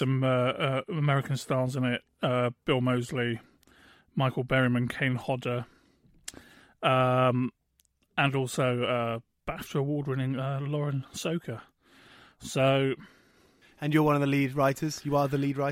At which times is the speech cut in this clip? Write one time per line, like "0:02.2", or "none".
none